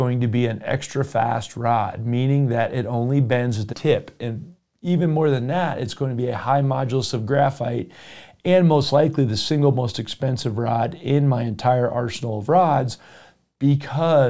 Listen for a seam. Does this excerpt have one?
yes; 1 cut; at 3.7 s

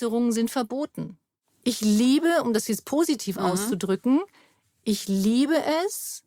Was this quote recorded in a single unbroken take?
yes; 0 cuts

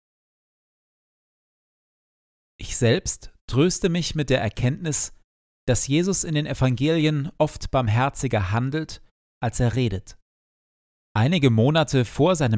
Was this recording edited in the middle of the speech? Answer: yes; 1 cut; at 11.0 s

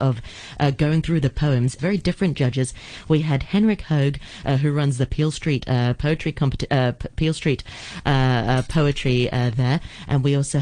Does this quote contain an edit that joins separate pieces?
yes; 1 cut; at 1.8 s

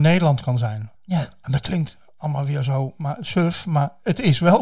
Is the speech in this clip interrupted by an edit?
yes; 1 cut; at 0.9 s

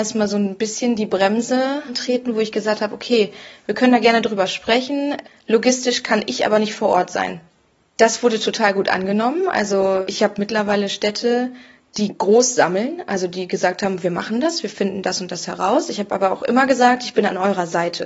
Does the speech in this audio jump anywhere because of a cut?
no; 0 cuts

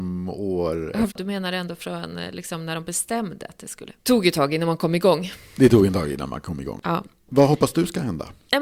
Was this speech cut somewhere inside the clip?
yes; 1 cut; at 1.1 s

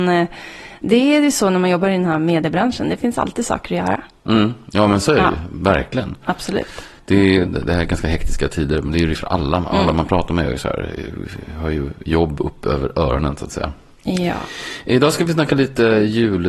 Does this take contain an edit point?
yes; 1 cut; at 7.5 s

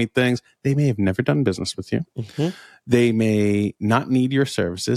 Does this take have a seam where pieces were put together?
yes; 1 cut; at 2.1 s

